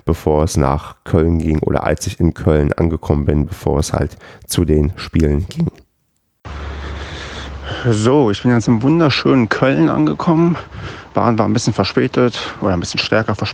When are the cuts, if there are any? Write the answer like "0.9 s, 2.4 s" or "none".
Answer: none